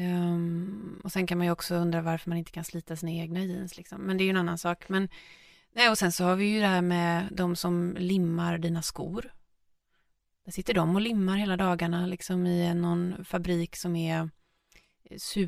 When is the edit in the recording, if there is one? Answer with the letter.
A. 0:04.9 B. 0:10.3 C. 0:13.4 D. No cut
D